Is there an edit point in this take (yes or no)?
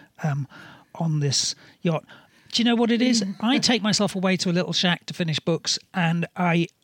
no